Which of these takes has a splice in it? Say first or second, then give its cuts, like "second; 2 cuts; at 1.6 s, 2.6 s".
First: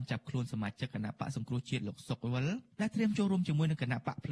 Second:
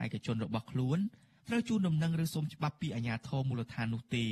first; 1 cut; at 2.7 s